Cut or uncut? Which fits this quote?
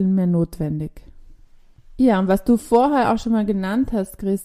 uncut